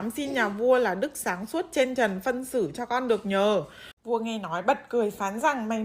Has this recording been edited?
yes; 1 cut; at 4.0 s

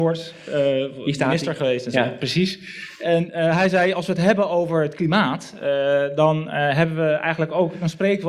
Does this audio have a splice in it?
no; 0 cuts

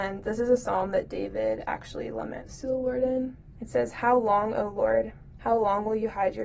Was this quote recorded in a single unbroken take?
no; 2 cuts; at 3.6 s, 5.4 s

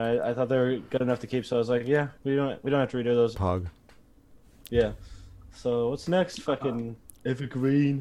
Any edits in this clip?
yes; 1 cut; at 3.3 s

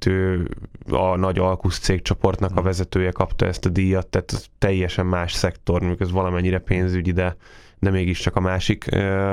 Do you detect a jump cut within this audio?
no; 0 cuts

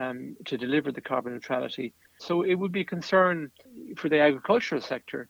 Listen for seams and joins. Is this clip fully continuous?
no; 1 cut; at 2.2 s

